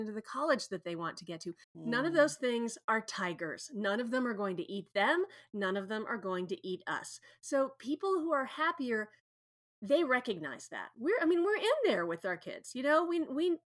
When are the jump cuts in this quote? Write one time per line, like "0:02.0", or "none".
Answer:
0:01.6